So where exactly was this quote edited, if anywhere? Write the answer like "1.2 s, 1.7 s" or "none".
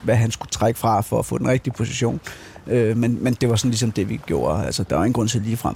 none